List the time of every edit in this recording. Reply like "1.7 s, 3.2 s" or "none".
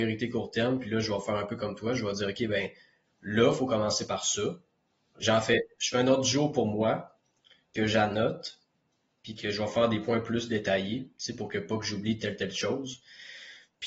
5.1 s